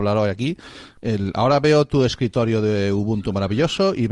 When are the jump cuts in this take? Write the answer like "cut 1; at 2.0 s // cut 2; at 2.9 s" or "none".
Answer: cut 1; at 1.0 s